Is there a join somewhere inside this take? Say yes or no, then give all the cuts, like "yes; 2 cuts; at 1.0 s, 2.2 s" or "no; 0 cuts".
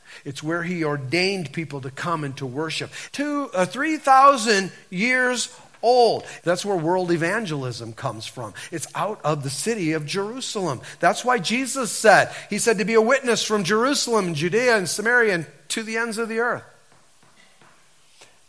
yes; 2 cuts; at 3.1 s, 6.4 s